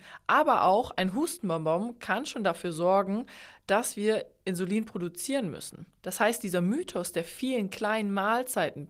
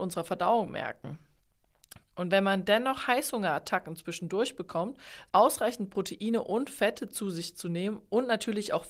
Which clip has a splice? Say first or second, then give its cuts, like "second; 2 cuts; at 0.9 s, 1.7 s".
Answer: second; 2 cuts; at 2.0 s, 5.3 s